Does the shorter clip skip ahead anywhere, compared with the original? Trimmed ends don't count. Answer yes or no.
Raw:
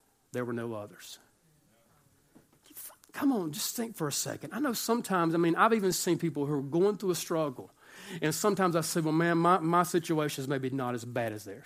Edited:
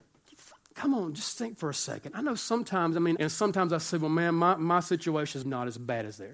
yes